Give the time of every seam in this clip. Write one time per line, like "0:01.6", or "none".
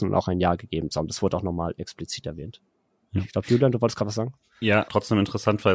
0:04.9